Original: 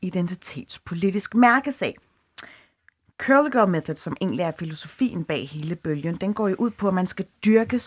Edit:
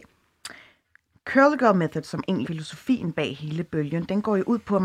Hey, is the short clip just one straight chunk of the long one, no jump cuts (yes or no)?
no